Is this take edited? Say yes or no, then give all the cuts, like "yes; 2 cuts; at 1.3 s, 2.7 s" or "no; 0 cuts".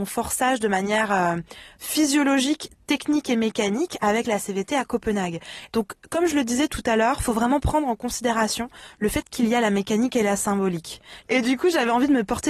yes; 2 cuts; at 5.7 s, 11.2 s